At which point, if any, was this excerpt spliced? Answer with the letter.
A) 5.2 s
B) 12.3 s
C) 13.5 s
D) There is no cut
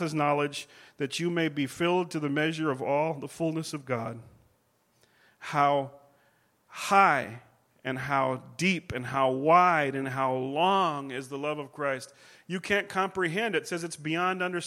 D